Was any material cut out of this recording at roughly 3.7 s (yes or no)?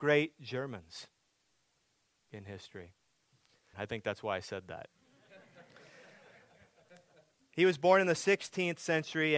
yes